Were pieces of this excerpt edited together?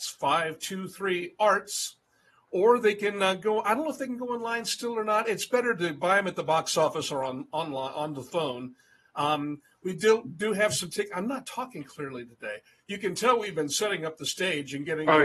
no; 0 cuts

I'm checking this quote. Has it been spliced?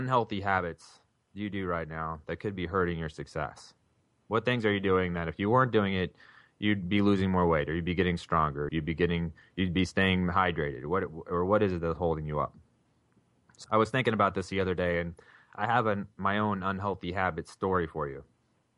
yes; 2 cuts; at 8.7 s, 13.6 s

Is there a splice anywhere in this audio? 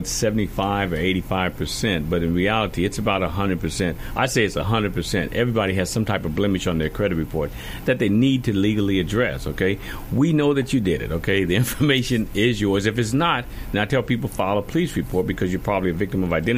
no; 0 cuts

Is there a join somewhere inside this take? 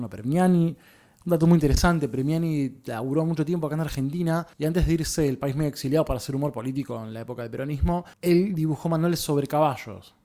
yes; 2 cuts; at 4.5 s, 8.1 s

